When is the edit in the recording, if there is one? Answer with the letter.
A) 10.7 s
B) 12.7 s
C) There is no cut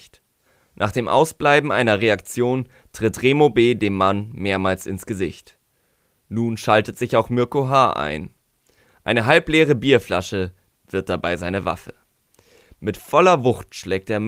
A